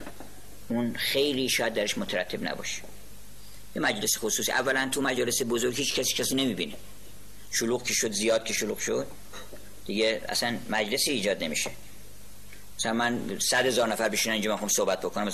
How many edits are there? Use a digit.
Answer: 0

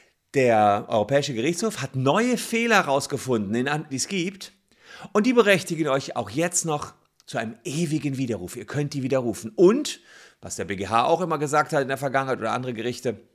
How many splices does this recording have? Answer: 1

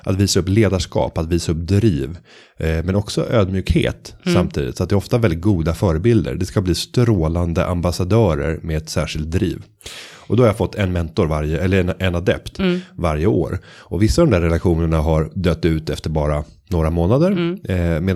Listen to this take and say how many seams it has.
0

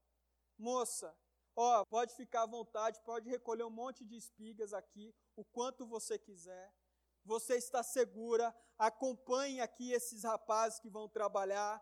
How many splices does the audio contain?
1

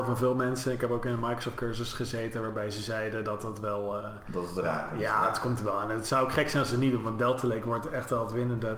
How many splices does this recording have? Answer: 0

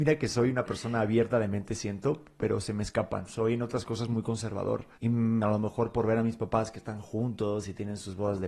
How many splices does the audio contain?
1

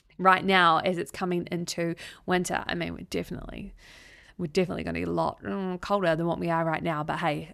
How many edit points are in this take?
0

